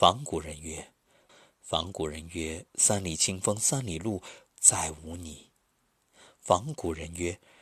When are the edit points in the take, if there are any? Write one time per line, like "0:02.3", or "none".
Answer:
0:01.3
0:04.5
0:06.0